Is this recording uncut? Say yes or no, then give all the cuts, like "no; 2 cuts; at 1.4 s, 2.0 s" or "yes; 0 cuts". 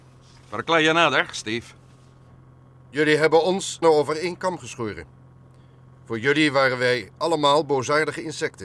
no; 1 cut; at 3.8 s